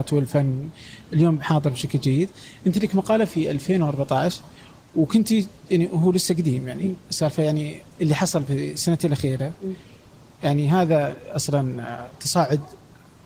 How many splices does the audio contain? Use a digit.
1